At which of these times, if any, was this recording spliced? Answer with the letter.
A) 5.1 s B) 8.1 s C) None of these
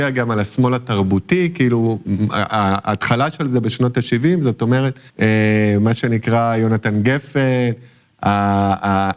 A